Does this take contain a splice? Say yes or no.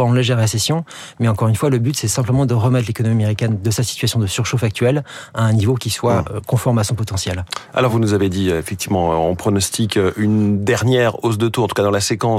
no